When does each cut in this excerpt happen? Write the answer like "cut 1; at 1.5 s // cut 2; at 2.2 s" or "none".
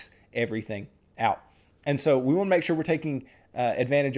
none